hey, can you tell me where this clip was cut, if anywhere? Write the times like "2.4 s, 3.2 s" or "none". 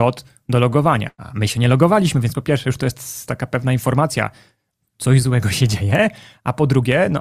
none